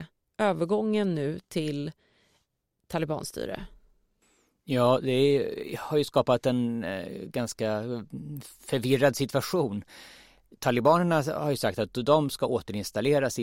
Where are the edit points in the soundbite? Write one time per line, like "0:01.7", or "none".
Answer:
none